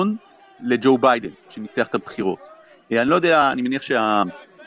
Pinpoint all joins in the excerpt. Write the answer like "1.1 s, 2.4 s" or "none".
none